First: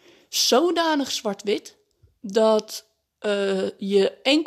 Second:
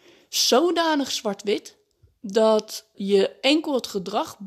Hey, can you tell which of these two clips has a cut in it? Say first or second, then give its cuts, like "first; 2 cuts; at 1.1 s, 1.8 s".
second; 1 cut; at 2.9 s